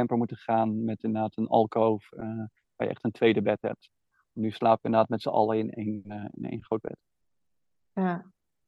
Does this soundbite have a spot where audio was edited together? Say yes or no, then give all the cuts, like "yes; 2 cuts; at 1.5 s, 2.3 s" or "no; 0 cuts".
no; 0 cuts